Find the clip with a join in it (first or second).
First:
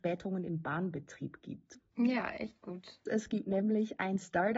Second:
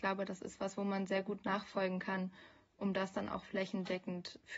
first